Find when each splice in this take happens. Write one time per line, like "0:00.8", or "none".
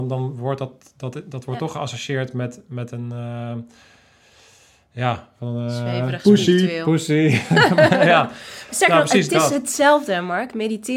none